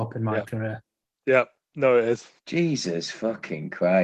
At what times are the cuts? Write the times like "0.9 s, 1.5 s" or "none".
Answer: 2.4 s